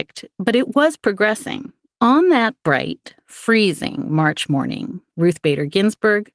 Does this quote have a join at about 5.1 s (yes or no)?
no